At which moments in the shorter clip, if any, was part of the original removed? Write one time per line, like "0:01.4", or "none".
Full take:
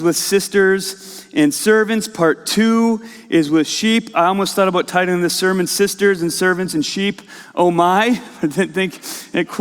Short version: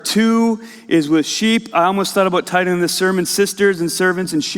none